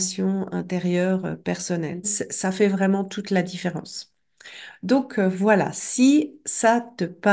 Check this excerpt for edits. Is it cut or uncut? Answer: cut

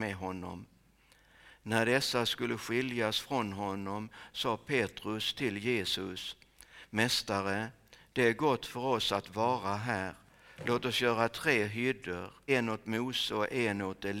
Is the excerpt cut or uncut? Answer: cut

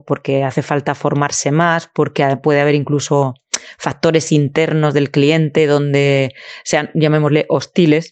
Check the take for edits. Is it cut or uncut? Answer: uncut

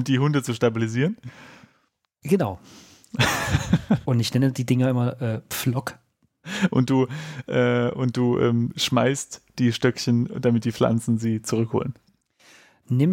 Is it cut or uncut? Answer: uncut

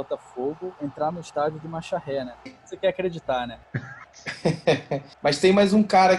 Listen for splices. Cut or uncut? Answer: cut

